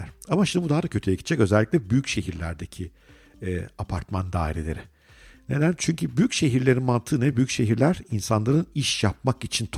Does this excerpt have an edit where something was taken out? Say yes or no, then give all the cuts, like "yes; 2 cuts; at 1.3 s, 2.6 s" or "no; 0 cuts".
no; 0 cuts